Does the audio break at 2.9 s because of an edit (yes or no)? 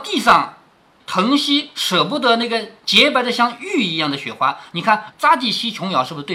no